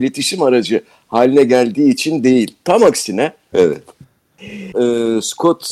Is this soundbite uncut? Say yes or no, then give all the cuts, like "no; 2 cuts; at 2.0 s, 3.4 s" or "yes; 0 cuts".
no; 2 cuts; at 3.5 s, 4.7 s